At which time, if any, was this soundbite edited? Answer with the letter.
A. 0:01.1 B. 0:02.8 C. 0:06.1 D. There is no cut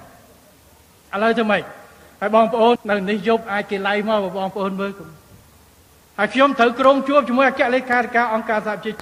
B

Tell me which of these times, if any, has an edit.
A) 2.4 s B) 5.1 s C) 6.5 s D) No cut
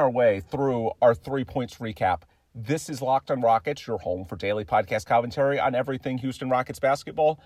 D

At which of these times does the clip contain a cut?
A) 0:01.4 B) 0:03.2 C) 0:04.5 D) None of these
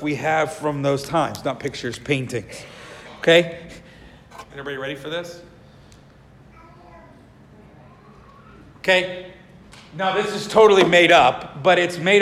C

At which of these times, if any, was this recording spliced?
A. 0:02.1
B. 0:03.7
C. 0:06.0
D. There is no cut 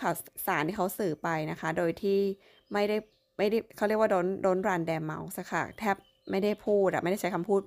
B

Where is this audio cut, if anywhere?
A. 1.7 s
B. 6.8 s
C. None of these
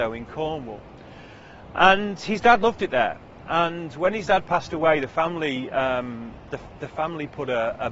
C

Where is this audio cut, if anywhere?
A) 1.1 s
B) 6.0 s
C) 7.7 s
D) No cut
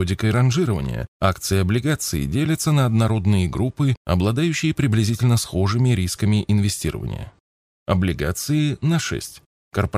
C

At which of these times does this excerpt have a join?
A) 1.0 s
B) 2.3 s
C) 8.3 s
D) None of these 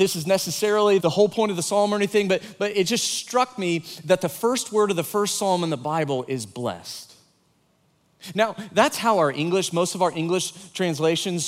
A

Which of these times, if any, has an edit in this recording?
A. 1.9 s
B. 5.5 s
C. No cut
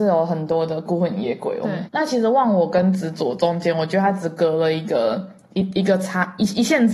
A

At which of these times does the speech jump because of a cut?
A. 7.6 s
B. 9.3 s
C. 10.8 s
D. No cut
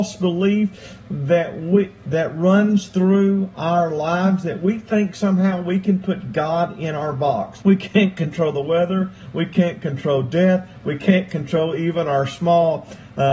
A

